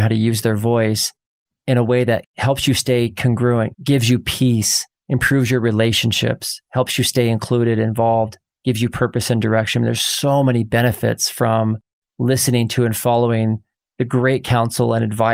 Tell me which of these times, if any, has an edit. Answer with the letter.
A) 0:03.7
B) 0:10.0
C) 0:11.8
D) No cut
A